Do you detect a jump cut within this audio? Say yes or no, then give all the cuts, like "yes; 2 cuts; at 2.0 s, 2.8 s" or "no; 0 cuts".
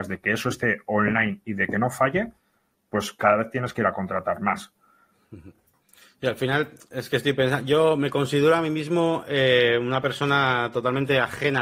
no; 0 cuts